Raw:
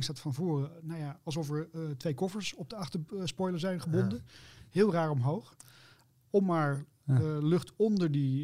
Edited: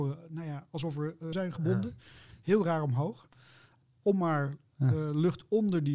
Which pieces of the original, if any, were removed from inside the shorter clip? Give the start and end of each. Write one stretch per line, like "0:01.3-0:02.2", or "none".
0:01.9-0:03.6

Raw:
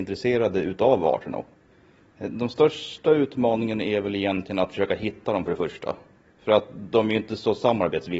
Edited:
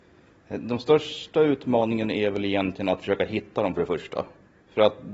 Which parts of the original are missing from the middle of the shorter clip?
none

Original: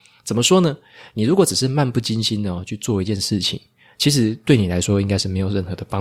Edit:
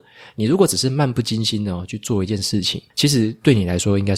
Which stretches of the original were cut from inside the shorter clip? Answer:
0:03.7-0:03.9

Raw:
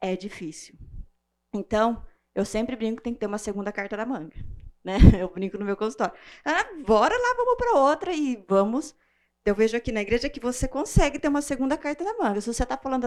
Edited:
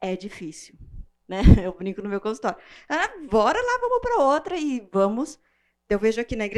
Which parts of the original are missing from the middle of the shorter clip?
0:01.2-0:04.8

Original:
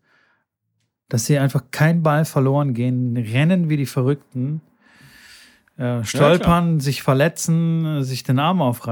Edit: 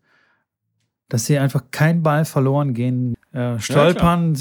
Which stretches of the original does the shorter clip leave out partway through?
0:03.1-0:05.6

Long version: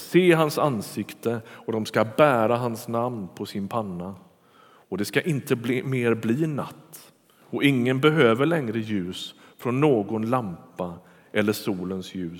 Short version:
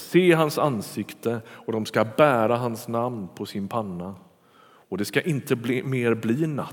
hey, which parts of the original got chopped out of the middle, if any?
none

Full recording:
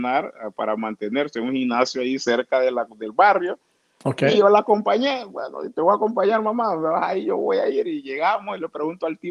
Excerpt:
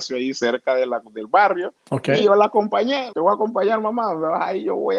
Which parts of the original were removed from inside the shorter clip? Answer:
0:03.6-0:03.9
0:05.3-0:05.7

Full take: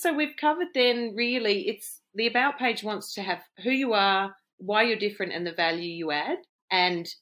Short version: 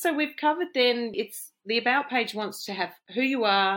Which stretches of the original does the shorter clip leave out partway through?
0:01.1-0:01.6

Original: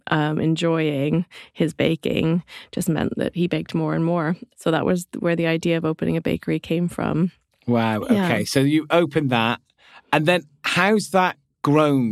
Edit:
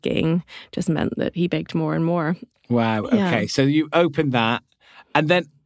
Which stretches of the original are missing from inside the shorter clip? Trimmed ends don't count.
0:04.5-0:07.5

